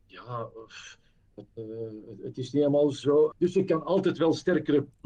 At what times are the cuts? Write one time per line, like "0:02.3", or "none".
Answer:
0:03.3

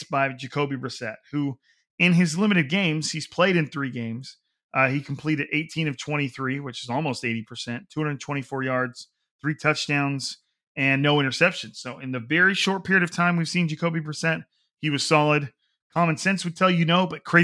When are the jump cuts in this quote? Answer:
0:15.8

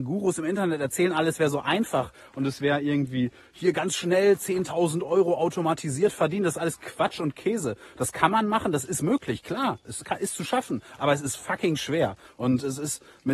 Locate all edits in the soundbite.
none

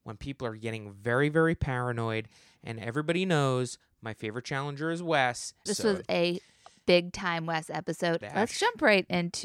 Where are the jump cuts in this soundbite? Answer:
0:05.7
0:08.2

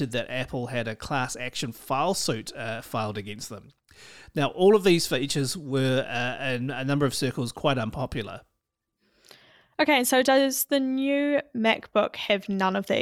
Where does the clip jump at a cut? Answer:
none

